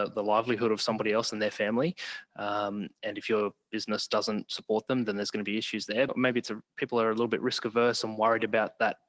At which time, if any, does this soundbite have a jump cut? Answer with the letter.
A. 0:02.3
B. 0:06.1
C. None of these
B